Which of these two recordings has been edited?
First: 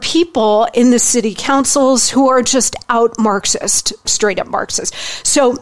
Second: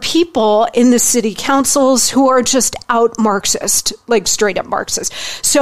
first; 1 cut; at 4.1 s

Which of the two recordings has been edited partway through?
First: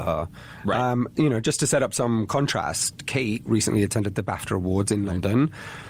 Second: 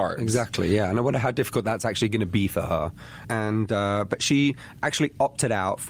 second; 1 cut; at 3.2 s

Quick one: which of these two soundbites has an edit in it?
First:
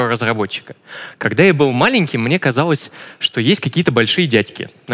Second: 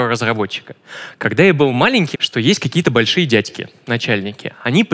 second; 1 cut; at 2.1 s

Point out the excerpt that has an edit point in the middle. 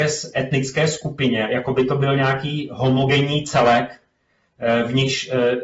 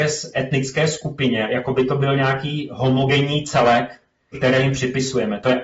second; 1 cut; at 4.3 s

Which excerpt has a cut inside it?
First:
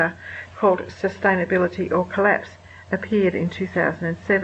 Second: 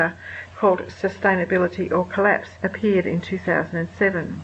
second; 1 cut; at 2.5 s

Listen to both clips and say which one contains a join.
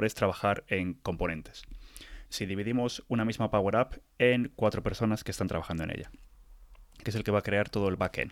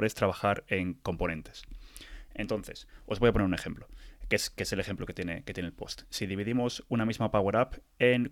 first; 2 cuts; at 2.3 s, 7.0 s

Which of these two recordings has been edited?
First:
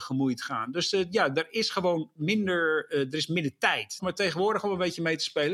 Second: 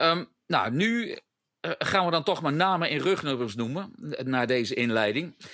first; 1 cut; at 4.0 s

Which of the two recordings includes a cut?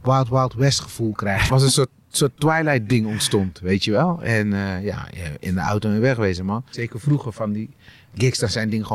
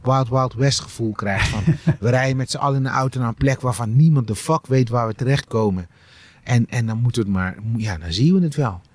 first; 2 cuts; at 1.5 s, 6.7 s

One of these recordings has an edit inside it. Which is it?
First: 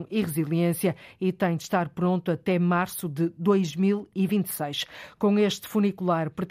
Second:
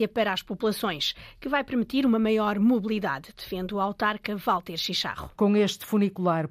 second; 1 cut; at 5.3 s

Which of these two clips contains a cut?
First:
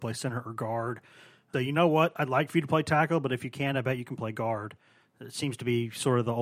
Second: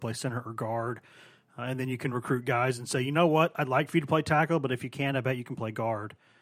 first; 1 cut; at 1.5 s

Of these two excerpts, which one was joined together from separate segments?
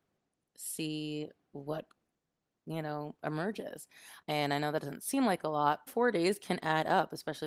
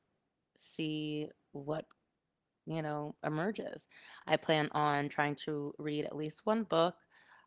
first; 2 cuts; at 4.2 s, 5.9 s

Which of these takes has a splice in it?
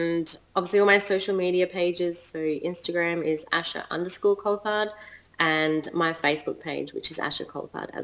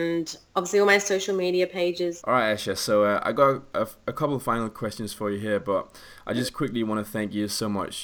second; 1 cut; at 2.2 s

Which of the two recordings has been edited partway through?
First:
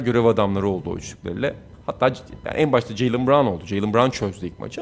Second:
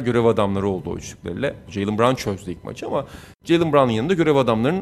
second; 1 cut; at 1.7 s

